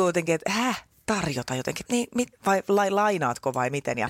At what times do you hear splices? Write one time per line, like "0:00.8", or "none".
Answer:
0:01.9